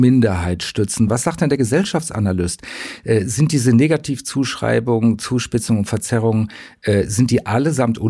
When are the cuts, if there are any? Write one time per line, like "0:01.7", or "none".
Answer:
none